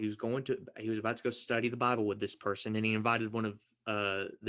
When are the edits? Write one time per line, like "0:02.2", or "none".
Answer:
none